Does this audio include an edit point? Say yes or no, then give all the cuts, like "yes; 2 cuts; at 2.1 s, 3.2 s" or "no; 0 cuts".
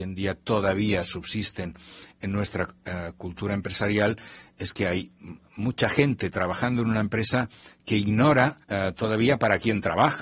yes; 1 cut; at 8.6 s